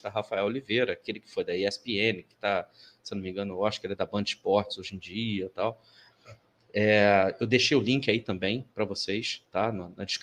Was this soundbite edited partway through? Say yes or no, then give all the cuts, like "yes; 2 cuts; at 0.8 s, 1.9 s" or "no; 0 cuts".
no; 0 cuts